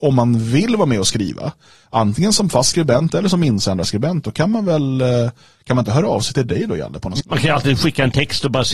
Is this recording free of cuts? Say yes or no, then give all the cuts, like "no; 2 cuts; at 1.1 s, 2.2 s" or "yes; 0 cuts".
no; 1 cut; at 7.2 s